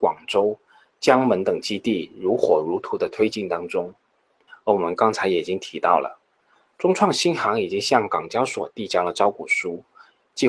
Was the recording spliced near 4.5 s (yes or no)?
no